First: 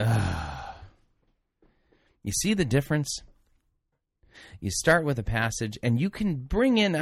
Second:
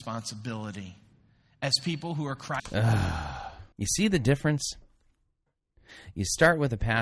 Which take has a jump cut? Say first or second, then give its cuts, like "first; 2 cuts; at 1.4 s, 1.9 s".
second; 2 cuts; at 2.6 s, 3.7 s